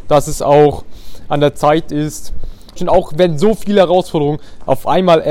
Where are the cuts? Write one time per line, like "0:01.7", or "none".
0:02.8